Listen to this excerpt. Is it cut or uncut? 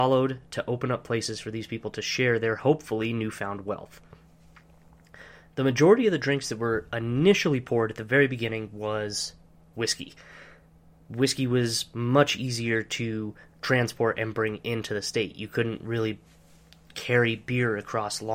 uncut